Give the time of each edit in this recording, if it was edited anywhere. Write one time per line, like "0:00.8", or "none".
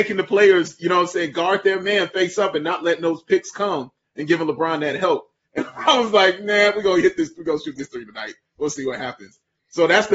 0:05.5